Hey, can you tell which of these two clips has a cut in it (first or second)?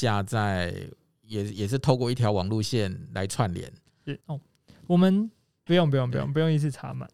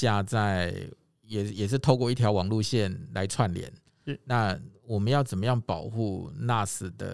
first